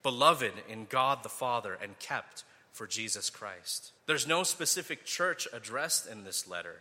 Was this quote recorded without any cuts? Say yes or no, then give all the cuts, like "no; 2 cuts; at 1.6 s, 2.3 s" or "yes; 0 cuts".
no; 1 cut; at 4.0 s